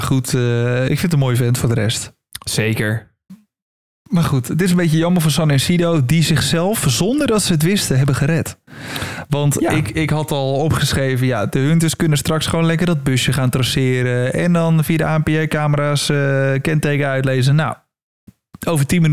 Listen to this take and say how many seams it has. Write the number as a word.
zero